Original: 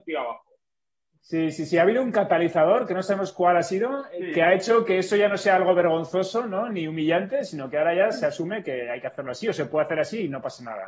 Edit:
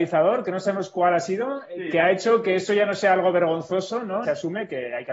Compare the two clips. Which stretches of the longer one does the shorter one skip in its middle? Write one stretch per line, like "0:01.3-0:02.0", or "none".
0:06.7-0:08.2